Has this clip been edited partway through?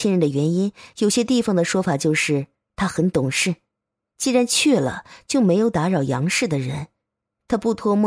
no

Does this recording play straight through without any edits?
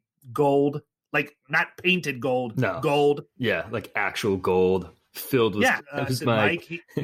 no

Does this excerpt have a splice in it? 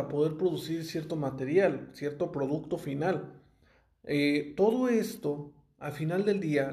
no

